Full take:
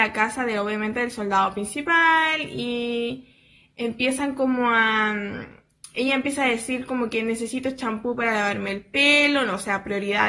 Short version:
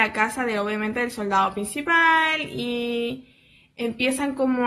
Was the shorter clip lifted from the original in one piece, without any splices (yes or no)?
yes